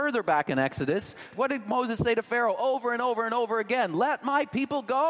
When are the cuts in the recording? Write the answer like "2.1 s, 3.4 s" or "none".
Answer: 1.3 s